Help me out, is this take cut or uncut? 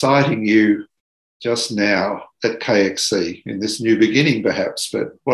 uncut